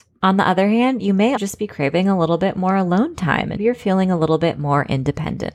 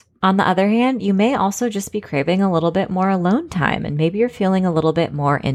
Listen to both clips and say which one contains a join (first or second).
first